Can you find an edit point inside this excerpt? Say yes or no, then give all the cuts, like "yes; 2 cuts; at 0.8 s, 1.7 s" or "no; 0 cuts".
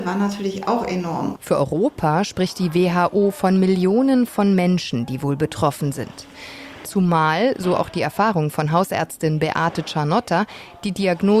yes; 2 cuts; at 1.3 s, 6.8 s